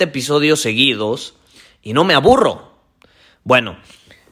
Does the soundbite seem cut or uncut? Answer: uncut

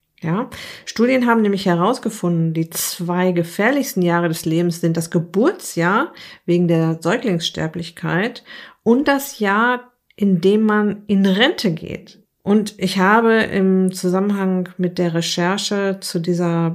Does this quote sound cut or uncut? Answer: cut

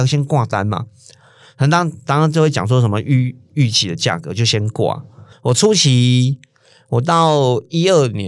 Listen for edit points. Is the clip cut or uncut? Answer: cut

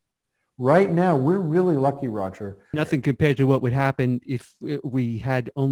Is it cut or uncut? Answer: cut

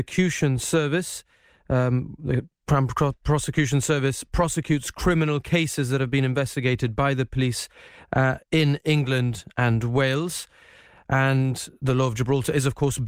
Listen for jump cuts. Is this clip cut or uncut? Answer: uncut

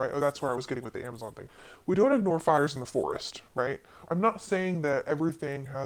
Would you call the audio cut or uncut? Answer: cut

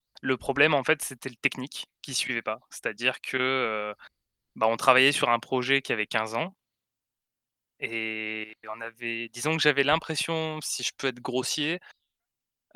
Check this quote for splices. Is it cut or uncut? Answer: uncut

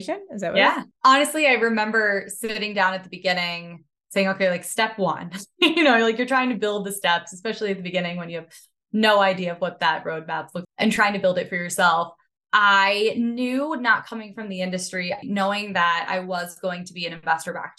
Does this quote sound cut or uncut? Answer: cut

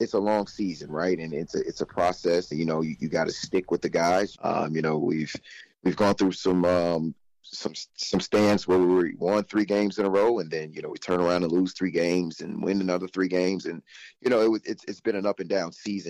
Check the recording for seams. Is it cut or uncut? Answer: cut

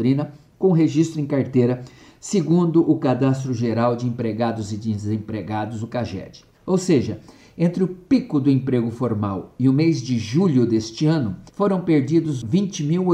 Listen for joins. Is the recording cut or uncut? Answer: cut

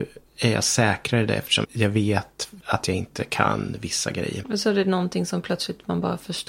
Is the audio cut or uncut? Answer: cut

